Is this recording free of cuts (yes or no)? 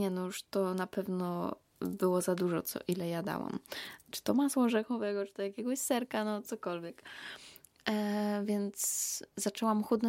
yes